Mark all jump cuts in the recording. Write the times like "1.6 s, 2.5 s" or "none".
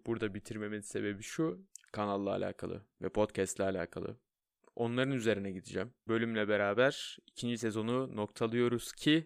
1.9 s, 6.1 s